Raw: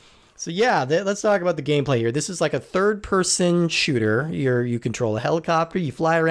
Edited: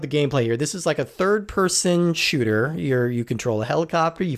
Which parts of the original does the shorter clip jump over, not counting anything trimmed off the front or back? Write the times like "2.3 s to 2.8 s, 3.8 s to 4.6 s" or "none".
none